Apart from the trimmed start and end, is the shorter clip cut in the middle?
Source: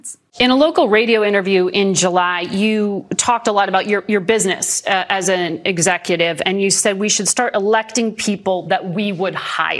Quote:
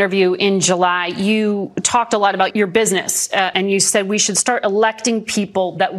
yes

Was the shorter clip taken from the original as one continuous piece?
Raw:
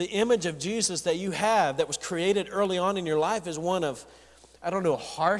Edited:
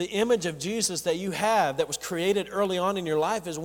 yes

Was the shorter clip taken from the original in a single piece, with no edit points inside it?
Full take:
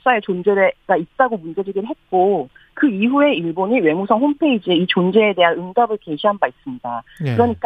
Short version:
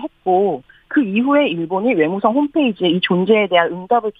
yes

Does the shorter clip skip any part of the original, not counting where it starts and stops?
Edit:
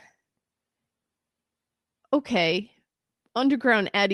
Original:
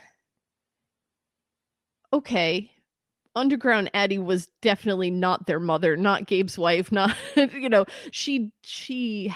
no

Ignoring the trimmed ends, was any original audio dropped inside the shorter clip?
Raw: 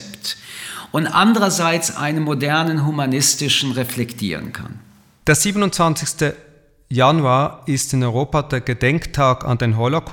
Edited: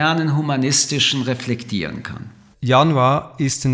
yes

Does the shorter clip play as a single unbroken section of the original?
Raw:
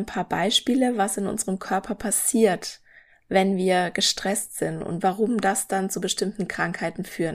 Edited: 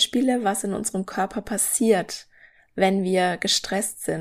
yes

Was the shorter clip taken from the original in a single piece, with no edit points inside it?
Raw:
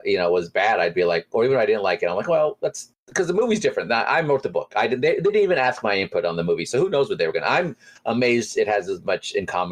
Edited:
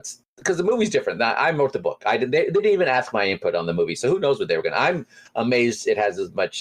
yes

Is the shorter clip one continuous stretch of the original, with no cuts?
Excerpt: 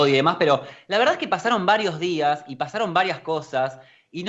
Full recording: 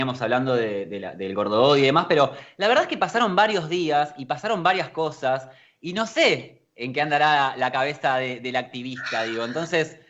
yes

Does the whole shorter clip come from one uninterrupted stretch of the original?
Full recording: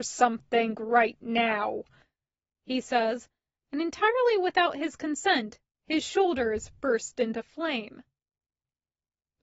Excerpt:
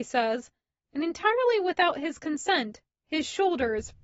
yes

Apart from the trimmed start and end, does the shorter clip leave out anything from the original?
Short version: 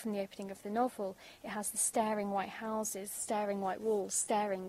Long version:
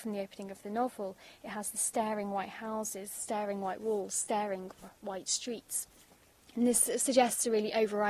no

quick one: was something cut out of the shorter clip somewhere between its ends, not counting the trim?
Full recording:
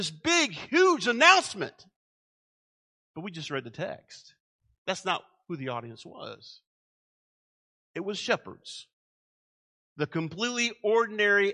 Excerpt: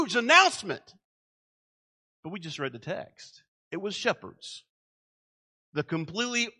yes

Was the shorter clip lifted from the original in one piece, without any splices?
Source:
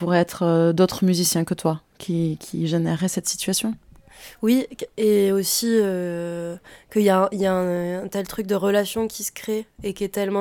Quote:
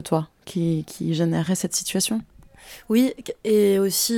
yes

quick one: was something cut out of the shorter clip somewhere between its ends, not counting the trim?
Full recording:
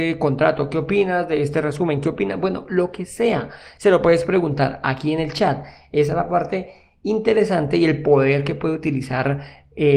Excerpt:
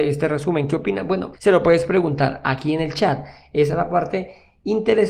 yes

